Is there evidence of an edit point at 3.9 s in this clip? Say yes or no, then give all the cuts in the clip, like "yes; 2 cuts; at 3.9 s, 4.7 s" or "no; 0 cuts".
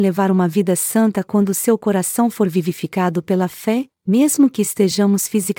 yes; 1 cut; at 3.9 s